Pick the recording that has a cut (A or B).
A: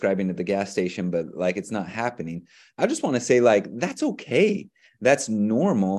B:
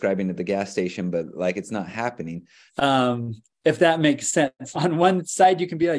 B